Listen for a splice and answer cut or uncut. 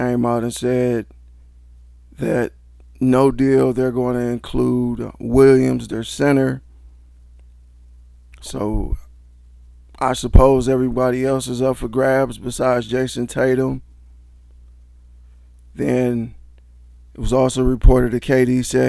uncut